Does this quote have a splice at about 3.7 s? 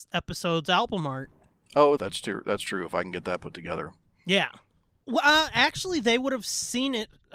no; 2 cuts; at 2.0 s, 5.0 s

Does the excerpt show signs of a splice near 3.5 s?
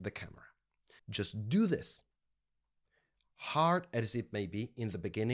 no; 1 cut; at 1.0 s

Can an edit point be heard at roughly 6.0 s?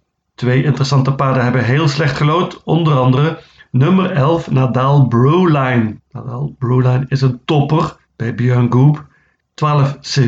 yes; 3 cuts; at 6.0 s, 8.0 s, 9.4 s

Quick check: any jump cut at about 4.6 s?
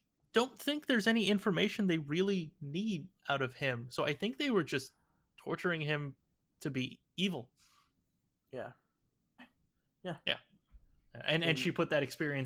no; 1 cut; at 9.4 s

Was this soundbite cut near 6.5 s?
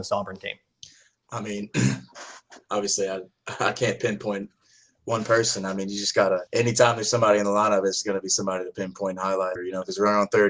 yes; 2 cuts; at 6.5 s, 9.6 s

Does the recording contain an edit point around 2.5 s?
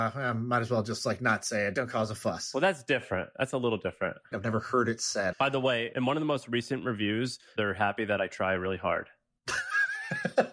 no; 3 cuts; at 4.3 s, 5.3 s, 7.6 s

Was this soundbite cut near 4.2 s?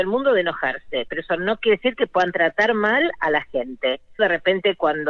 yes; 1 cut; at 4.2 s

